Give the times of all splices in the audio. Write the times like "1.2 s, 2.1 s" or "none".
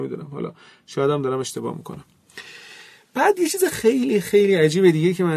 3.7 s

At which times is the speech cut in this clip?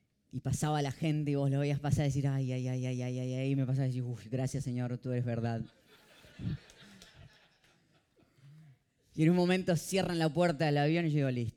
none

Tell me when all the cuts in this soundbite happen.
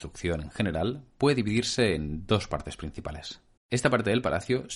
3.6 s

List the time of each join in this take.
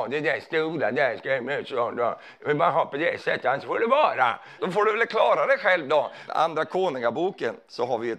4.6 s, 6.3 s

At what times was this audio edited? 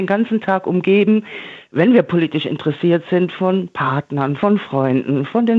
none

